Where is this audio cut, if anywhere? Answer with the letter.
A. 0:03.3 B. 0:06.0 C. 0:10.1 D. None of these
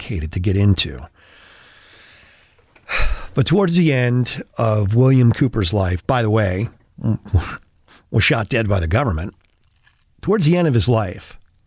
B